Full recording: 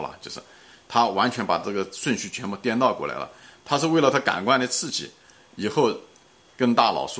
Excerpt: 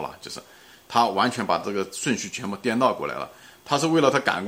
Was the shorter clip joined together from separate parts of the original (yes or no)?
no